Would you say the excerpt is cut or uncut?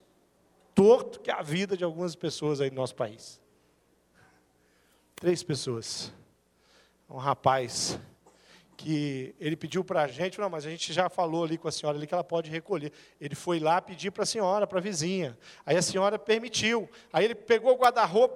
uncut